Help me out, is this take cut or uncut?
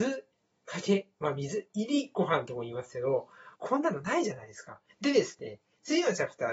cut